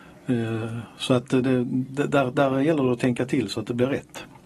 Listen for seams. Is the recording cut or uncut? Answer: uncut